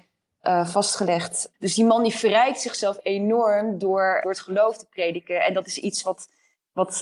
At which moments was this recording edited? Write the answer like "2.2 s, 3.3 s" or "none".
1.5 s, 4.2 s